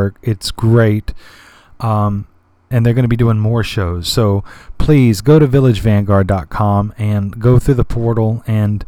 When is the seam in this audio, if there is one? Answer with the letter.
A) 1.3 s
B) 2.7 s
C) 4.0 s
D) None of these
B